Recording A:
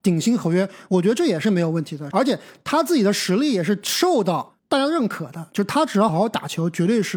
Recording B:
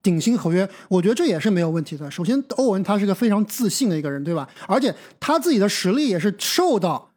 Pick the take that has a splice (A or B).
A